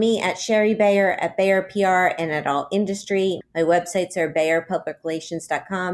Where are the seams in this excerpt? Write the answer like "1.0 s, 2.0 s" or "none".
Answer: 3.4 s